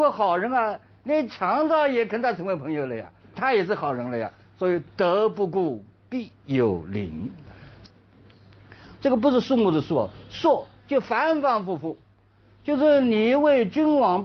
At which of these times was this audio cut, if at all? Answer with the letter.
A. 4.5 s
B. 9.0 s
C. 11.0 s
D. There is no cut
B